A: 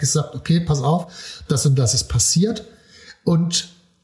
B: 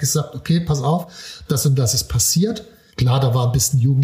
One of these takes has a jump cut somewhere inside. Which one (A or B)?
B